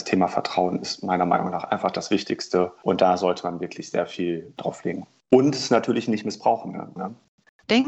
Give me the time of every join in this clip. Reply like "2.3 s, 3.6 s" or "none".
7.0 s